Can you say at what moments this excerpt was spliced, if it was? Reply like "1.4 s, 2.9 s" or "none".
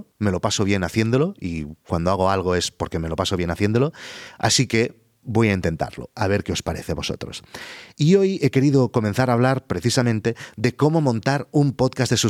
none